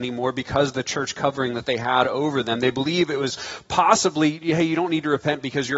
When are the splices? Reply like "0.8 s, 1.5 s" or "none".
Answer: none